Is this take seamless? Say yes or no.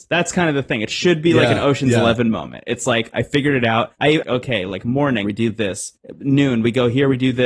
no